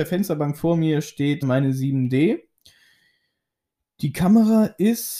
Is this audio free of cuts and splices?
no; 1 cut; at 1.4 s

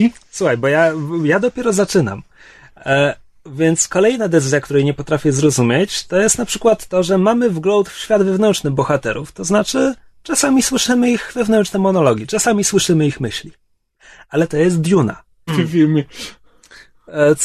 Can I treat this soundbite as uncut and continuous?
no; 1 cut; at 15.5 s

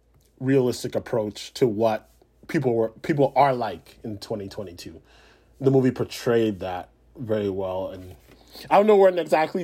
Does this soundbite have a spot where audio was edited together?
no; 0 cuts

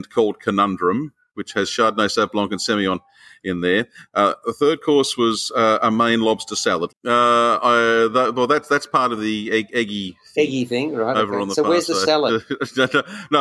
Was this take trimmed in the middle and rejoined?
yes; 1 cut; at 6.9 s

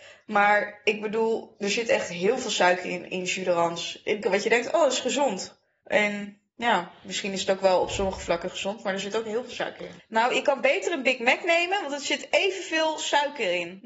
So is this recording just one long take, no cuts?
no; 2 cuts; at 4.2 s, 10.0 s

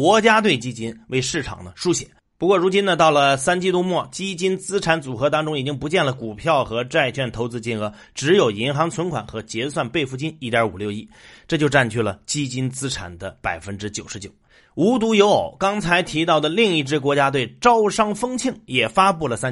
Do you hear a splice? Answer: no; 0 cuts

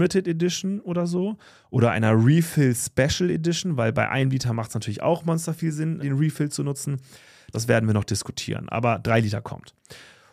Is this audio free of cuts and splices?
no; 2 cuts; at 6.0 s, 7.5 s

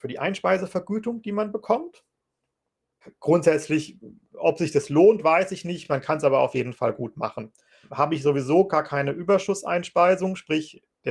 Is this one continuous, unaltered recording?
yes; 0 cuts

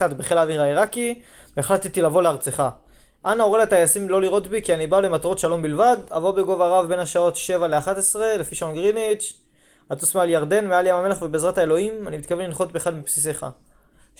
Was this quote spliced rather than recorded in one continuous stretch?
no; 0 cuts

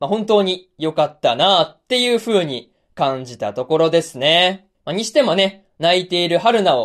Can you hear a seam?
yes; 1 cut; at 4.7 s

